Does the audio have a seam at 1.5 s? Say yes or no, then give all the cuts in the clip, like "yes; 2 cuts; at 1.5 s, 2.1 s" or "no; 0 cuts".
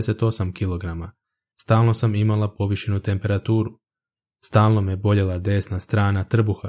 yes; 1 cut; at 1.5 s